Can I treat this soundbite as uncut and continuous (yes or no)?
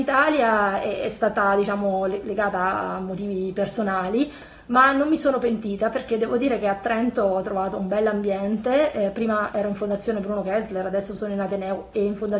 yes